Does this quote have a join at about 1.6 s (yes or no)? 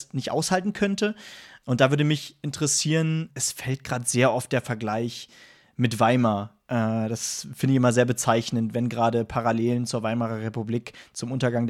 yes